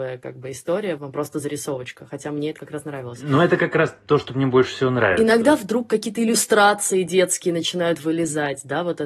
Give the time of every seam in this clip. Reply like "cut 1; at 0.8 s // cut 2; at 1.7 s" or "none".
cut 1; at 1.0 s